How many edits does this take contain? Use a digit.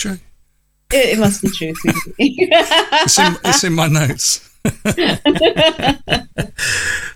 0